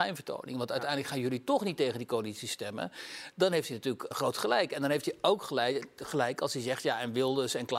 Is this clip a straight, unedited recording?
no; 1 cut; at 4.1 s

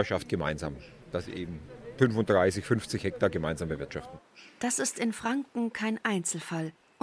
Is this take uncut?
yes; 0 cuts

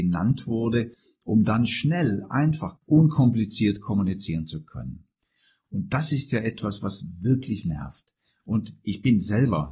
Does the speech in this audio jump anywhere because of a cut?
yes; 2 cuts; at 2.8 s, 7.6 s

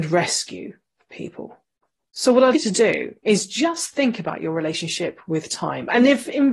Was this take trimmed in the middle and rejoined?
yes; 1 cut; at 2.5 s

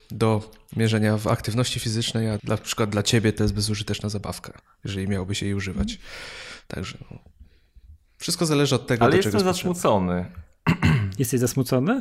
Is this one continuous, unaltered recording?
no; 1 cut; at 2.4 s

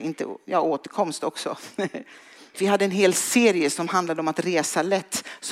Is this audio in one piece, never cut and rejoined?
no; 1 cut; at 2.5 s

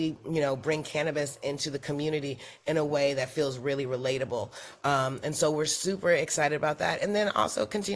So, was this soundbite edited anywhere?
no; 0 cuts

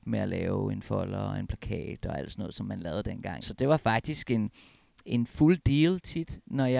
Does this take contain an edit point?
yes; 1 cut; at 3.4 s

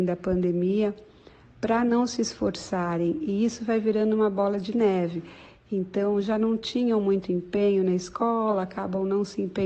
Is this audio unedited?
yes; 0 cuts

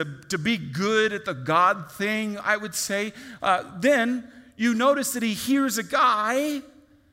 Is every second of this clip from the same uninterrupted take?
no; 1 cut; at 3.4 s

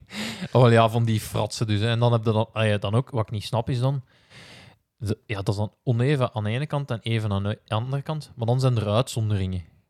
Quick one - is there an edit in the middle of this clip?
no; 0 cuts

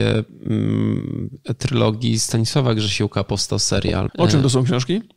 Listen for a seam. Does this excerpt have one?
yes; 1 cut; at 4.1 s

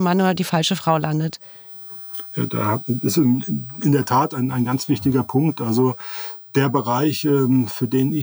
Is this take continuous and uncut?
yes; 0 cuts

